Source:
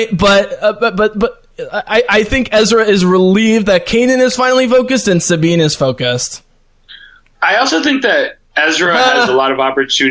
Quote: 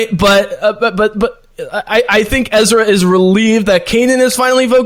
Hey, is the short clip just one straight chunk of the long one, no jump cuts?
yes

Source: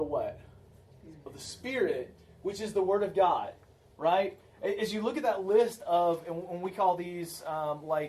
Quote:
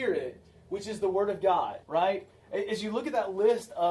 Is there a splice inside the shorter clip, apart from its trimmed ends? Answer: yes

